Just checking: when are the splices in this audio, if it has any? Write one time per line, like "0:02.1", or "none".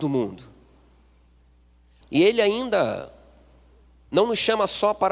0:02.0

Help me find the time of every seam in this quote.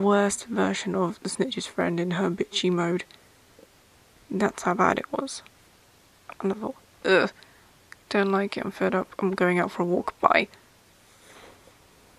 0:01.2

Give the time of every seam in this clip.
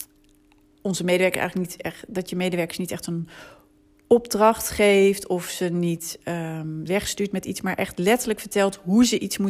0:06.9

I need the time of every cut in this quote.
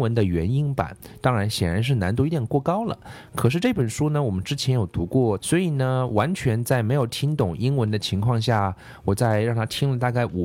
0:05.4

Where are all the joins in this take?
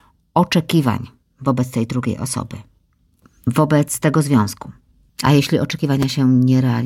0:05.1

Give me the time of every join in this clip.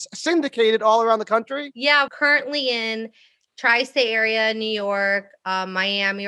0:02.1

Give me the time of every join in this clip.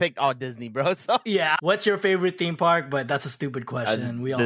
0:01.6

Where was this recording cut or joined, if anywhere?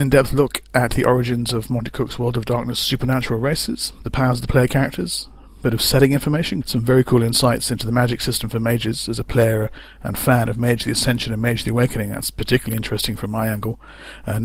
0:06.6

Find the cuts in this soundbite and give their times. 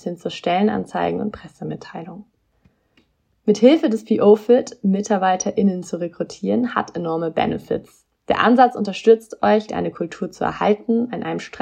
0:09.7

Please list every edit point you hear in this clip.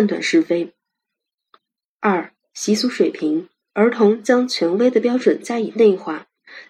0:01.8
0:03.6

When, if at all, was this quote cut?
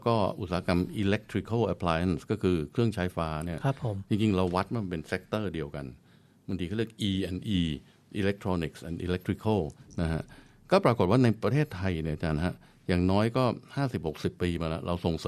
0:03.1

